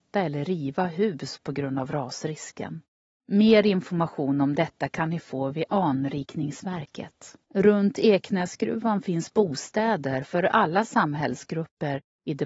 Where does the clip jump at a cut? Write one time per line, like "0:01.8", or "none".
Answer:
0:03.1
0:07.4